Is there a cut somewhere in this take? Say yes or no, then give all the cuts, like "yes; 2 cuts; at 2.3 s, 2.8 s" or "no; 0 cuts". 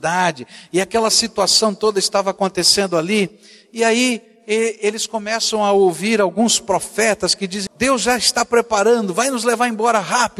yes; 1 cut; at 7.7 s